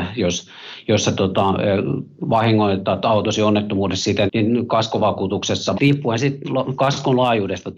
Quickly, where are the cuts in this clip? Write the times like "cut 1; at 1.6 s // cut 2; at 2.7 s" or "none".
cut 1; at 4.3 s // cut 2; at 5.7 s